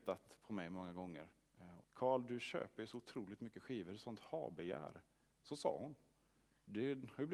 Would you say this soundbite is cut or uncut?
cut